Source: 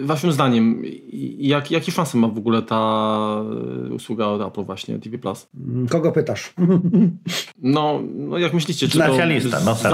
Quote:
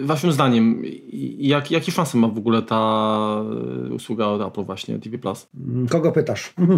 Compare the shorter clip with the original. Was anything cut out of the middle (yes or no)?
no